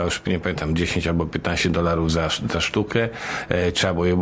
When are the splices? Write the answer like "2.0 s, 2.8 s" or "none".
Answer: none